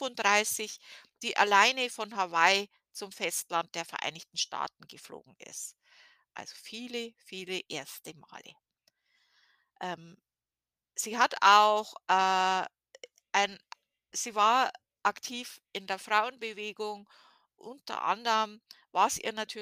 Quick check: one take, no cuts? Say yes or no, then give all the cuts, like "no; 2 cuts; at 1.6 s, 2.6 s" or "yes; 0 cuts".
yes; 0 cuts